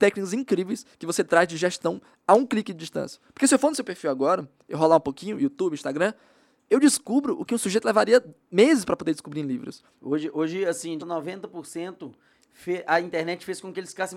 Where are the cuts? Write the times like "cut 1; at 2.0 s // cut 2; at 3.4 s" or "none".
cut 1; at 9.9 s // cut 2; at 11.0 s